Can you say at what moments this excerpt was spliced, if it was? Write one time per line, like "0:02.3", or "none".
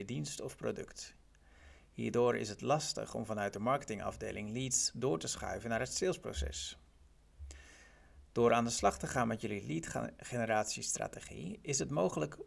none